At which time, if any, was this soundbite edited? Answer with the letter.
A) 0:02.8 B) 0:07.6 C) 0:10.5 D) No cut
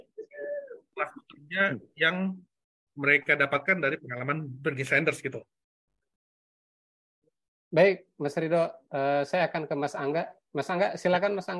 D